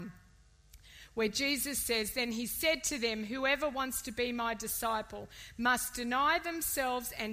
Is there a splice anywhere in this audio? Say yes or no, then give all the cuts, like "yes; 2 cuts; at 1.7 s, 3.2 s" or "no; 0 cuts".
no; 0 cuts